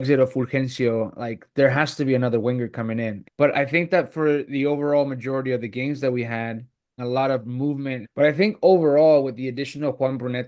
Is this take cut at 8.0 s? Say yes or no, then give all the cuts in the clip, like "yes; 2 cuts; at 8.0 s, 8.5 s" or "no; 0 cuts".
yes; 3 cuts; at 3.2 s, 7.0 s, 8.0 s